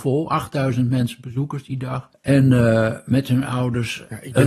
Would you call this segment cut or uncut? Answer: cut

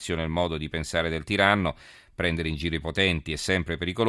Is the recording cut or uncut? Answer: uncut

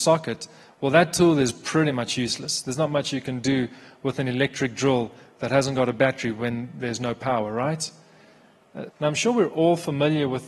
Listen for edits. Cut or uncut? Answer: cut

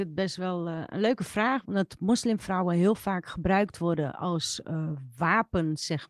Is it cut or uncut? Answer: cut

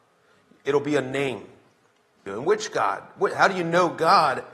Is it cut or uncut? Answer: cut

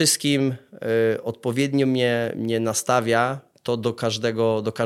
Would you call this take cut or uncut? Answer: uncut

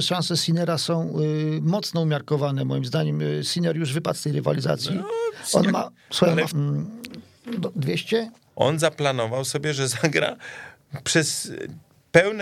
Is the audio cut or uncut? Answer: cut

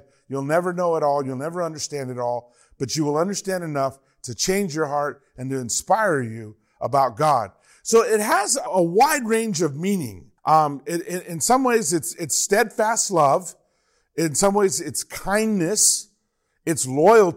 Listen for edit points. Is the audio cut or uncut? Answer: cut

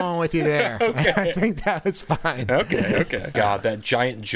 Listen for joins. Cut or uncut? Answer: cut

